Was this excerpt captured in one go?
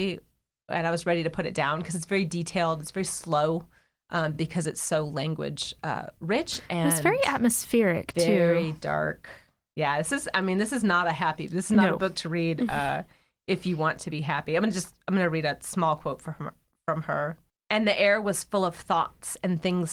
yes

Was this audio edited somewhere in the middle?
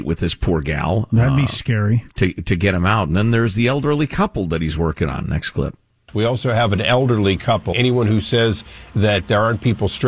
yes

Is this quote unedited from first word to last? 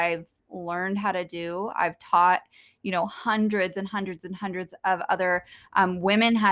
yes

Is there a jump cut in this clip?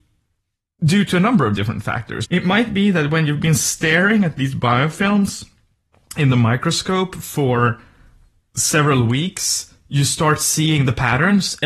yes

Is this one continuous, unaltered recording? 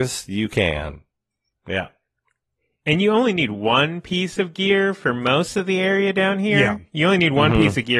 no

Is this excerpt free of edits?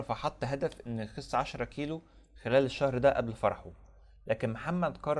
yes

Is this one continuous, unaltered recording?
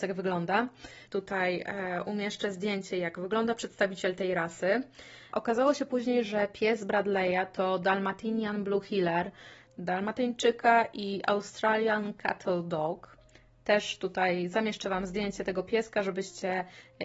no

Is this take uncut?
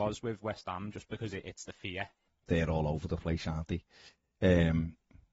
no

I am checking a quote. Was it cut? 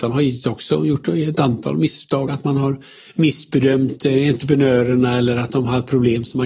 no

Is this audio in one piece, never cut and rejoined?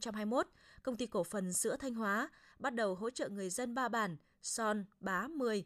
yes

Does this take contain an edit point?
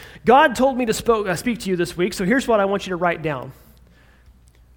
no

